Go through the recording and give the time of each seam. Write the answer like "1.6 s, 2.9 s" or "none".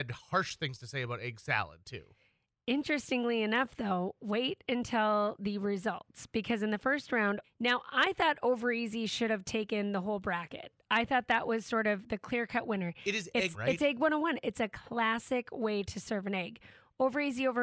7.4 s, 13.5 s